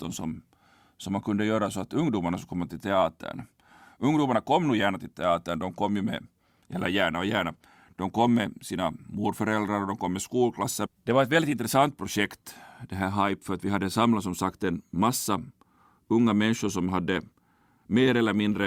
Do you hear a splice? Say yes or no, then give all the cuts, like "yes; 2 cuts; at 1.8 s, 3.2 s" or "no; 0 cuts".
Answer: yes; 1 cut; at 10.9 s